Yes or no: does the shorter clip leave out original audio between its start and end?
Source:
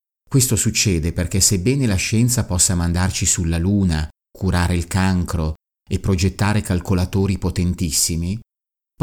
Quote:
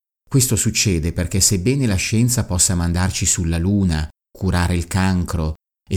no